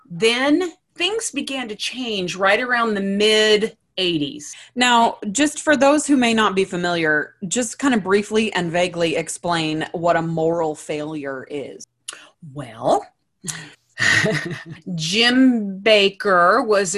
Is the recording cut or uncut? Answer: uncut